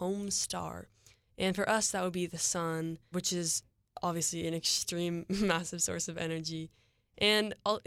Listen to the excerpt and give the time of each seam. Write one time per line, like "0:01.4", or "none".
0:03.1